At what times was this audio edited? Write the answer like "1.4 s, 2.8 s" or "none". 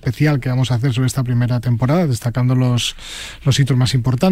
none

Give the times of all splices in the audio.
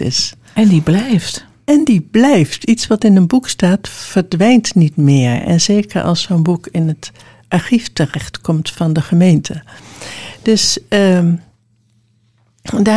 none

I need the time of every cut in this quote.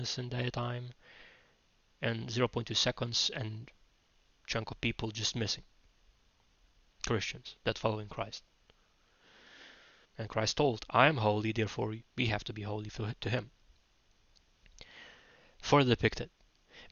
10.0 s, 12.1 s

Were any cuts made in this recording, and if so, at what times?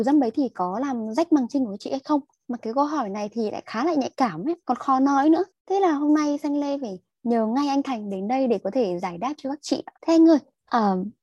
none

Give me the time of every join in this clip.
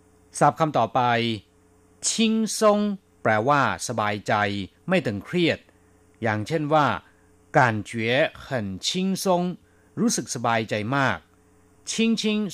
none

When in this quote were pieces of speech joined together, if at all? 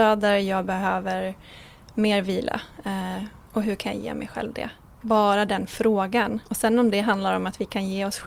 none

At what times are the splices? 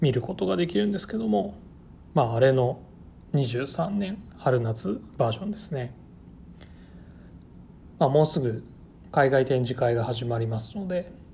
none

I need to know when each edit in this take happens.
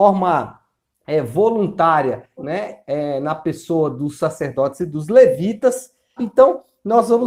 2.4 s, 6.2 s

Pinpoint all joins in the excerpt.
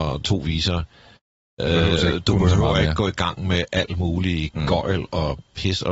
none

